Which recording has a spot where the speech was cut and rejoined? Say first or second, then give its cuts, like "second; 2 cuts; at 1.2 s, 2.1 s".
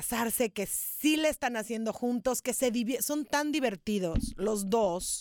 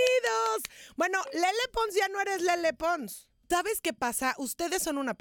second; 1 cut; at 3.5 s